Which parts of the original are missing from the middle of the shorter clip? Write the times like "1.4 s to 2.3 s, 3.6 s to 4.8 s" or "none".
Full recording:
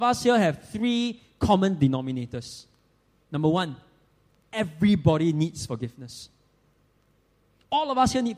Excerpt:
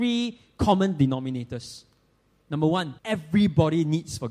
3.8 s to 4.5 s